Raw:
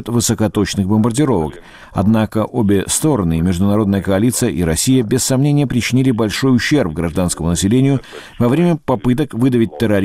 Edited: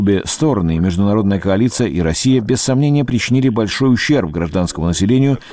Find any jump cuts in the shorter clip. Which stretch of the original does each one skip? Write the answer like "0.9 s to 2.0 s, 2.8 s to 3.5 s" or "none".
none